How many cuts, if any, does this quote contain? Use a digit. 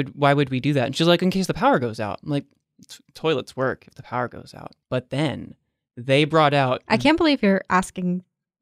1